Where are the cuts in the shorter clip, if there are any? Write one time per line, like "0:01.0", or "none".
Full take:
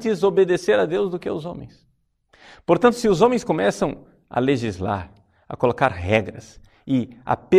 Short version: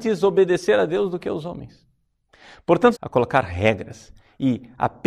0:02.9